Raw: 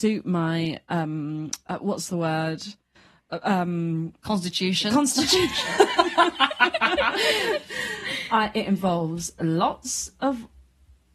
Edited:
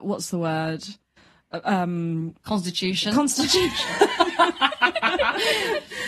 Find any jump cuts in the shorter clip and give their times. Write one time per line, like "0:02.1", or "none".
none